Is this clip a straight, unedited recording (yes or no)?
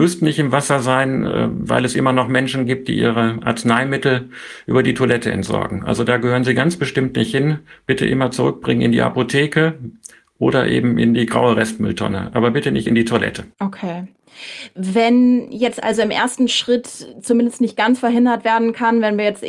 no